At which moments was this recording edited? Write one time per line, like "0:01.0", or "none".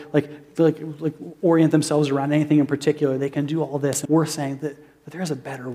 0:04.1